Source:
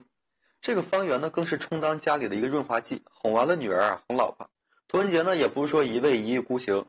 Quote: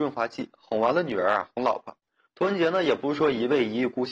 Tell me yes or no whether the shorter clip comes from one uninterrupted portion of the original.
yes